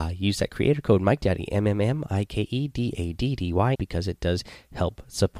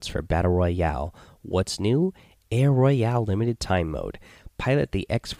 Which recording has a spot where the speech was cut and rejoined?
first; 1 cut; at 3.7 s

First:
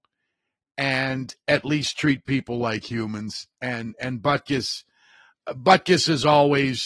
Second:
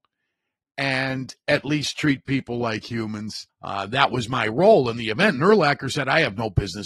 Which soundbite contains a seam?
second; 1 cut; at 3.5 s

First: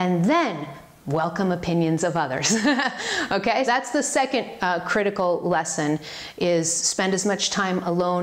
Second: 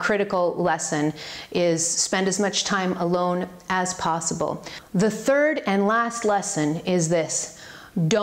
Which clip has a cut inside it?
first; 1 cut; at 3.7 s

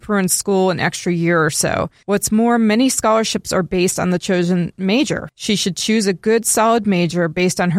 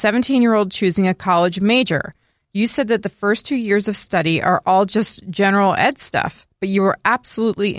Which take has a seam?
first; 2 cuts; at 2.0 s, 5.3 s

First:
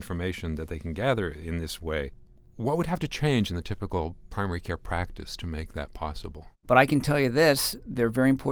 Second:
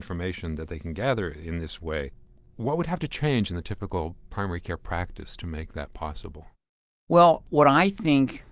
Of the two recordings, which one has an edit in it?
first; 1 cut; at 6.6 s

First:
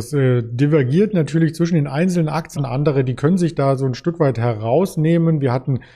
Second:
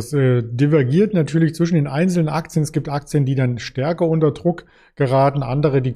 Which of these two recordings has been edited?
first; 1 cut; at 2.6 s

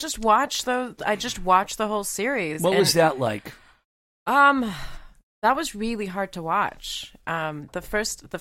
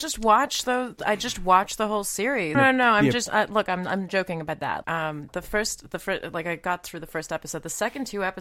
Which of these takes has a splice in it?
second; 2 cuts; at 2.5 s, 4.8 s

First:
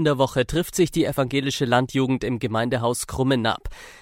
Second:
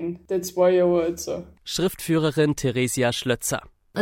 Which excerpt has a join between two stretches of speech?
second; 1 cut; at 1.6 s

